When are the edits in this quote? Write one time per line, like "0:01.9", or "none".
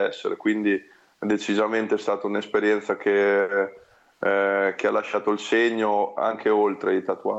none